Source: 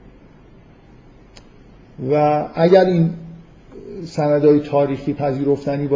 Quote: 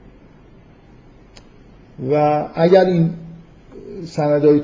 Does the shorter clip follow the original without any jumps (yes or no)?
yes